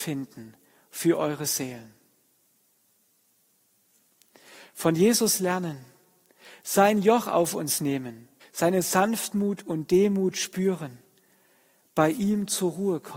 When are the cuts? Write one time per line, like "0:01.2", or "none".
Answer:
0:08.4